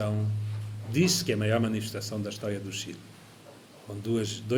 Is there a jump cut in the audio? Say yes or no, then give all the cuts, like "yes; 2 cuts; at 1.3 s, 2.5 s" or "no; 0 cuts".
no; 0 cuts